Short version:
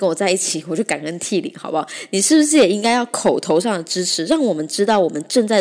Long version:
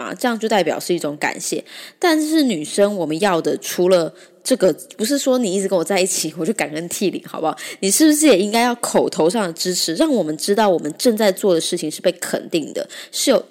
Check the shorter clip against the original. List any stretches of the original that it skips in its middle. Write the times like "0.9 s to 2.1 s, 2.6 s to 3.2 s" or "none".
none